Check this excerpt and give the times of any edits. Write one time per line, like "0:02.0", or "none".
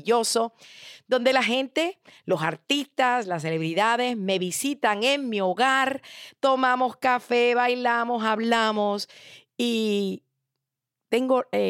none